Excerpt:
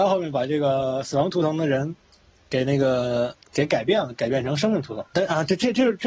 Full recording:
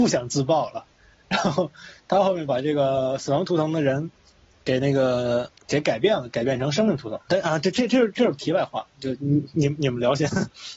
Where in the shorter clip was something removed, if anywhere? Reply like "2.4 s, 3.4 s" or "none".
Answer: none